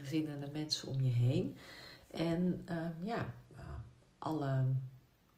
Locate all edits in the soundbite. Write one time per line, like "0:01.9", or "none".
none